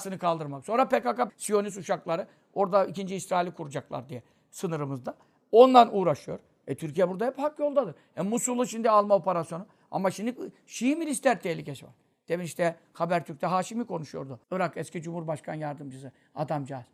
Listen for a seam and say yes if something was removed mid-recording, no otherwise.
yes